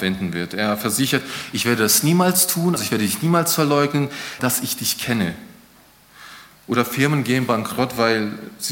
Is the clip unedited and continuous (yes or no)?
no